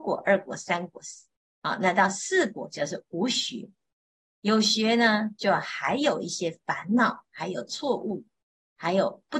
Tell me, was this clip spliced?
no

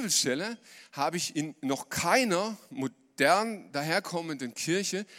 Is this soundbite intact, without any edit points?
yes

